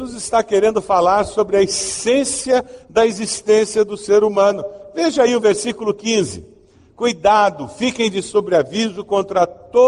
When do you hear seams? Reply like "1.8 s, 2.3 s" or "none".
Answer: none